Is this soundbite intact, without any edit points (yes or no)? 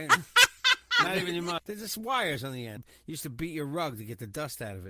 no